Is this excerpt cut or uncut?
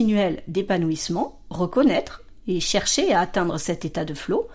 uncut